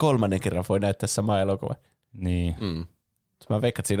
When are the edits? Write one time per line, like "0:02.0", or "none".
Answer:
none